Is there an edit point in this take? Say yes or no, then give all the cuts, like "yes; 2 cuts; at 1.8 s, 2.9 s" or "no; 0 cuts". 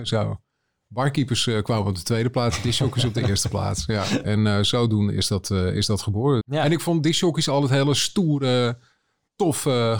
yes; 2 cuts; at 4.2 s, 6.4 s